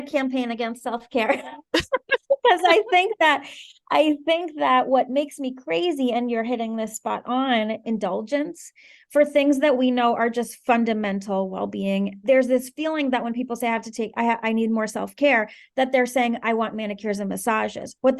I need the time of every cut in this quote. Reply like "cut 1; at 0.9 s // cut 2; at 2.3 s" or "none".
cut 1; at 7.8 s // cut 2; at 12.2 s